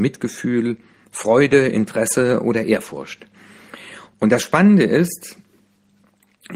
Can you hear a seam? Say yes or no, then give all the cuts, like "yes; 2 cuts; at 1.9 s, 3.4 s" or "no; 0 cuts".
no; 0 cuts